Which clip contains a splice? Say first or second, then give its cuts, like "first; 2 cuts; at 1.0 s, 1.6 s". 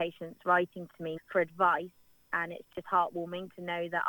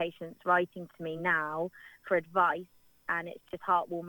first; 1 cut; at 1.2 s